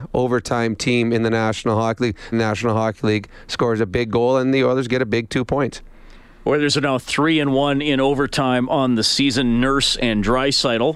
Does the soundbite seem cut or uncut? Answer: cut